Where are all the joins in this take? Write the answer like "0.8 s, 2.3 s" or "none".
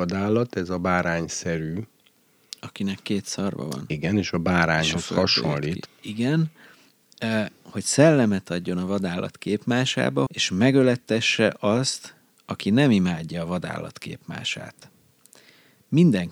5.9 s, 10.3 s